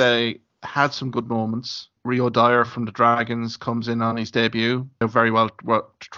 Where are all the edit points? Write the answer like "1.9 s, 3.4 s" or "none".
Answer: 2.0 s, 5.0 s